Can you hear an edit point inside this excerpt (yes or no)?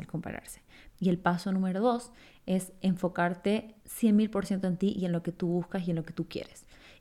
yes